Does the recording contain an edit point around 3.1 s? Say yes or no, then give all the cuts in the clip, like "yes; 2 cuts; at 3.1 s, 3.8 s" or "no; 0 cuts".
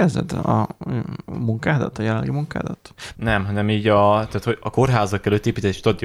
yes; 1 cut; at 3.1 s